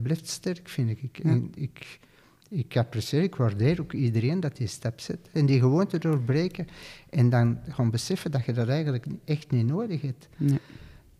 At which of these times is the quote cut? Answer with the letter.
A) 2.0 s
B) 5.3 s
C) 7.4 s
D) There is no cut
B